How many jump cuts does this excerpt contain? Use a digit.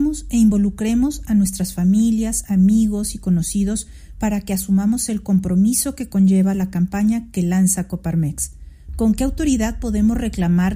1